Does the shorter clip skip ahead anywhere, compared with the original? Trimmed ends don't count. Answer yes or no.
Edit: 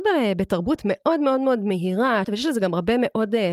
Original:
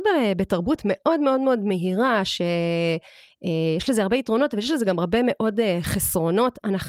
yes